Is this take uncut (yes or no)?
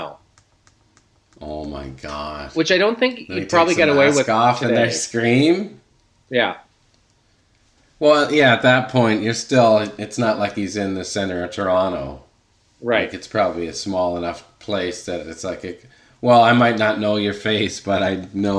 yes